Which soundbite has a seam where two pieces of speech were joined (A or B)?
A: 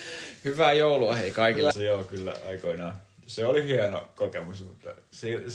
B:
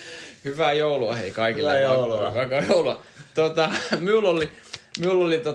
A